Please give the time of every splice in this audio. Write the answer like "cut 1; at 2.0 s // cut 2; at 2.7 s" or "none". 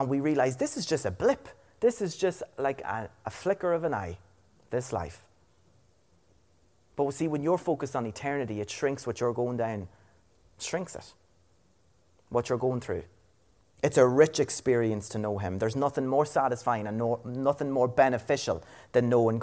cut 1; at 13.6 s